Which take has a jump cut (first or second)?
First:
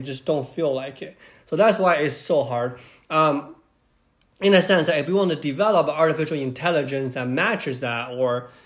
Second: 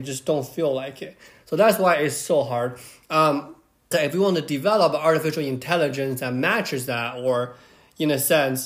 second